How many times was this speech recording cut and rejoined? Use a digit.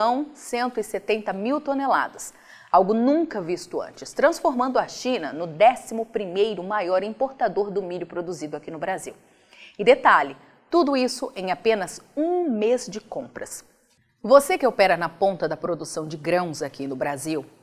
0